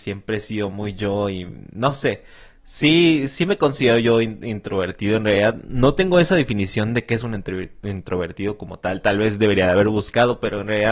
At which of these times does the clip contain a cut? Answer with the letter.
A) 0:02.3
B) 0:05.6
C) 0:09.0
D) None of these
D